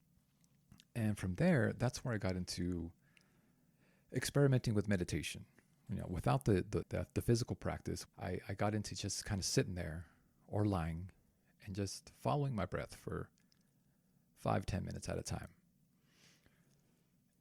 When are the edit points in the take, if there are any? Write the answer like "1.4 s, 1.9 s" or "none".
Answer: 6.8 s, 8.1 s